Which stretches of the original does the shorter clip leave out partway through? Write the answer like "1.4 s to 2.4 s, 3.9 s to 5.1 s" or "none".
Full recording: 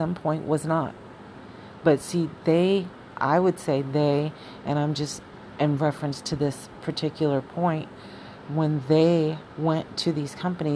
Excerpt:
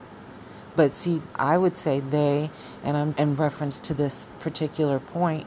2.4 s to 3.1 s, 4.9 s to 5.5 s